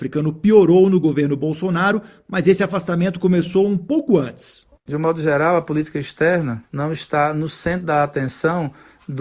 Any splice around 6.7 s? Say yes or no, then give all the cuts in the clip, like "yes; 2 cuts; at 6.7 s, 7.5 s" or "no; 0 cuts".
yes; 2 cuts; at 4.8 s, 6.7 s